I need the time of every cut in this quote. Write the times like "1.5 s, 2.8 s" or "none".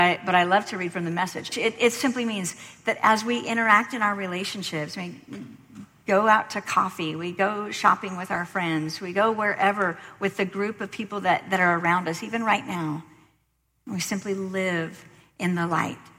1.5 s